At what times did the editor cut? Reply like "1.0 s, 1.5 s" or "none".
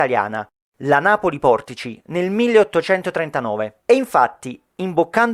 none